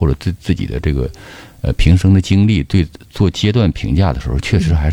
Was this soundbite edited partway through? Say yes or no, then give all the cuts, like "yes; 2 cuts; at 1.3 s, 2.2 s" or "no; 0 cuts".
no; 0 cuts